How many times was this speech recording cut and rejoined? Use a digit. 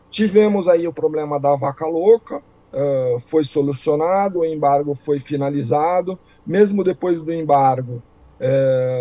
0